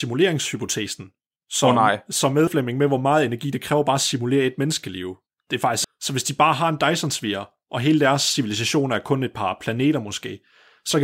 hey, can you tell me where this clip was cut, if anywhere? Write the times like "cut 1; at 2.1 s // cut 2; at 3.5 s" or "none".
cut 1; at 2.5 s // cut 2; at 5.8 s